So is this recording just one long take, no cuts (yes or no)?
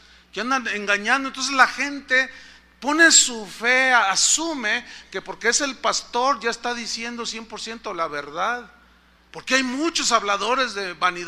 no